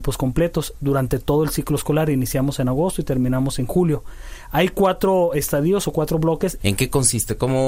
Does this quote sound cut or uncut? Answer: cut